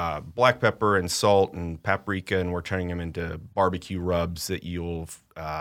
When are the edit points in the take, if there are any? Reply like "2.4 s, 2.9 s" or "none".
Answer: none